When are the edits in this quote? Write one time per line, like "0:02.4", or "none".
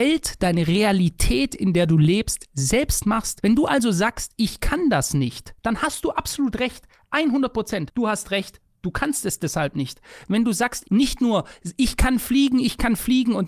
0:10.8